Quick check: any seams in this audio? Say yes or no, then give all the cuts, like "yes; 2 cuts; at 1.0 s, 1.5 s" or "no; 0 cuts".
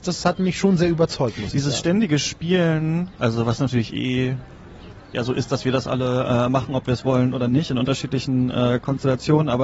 no; 0 cuts